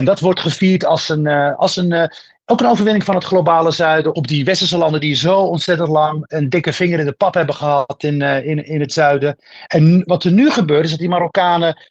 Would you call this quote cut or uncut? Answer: cut